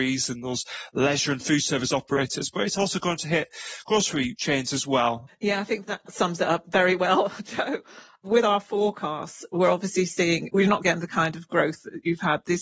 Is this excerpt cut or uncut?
cut